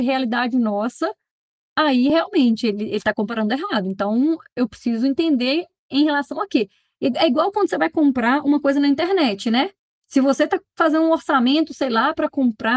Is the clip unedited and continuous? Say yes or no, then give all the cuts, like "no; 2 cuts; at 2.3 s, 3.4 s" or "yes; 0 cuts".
yes; 0 cuts